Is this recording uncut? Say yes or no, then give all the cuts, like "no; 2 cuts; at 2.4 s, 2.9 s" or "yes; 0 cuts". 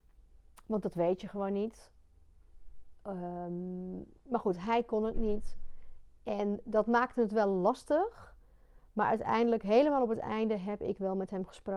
yes; 0 cuts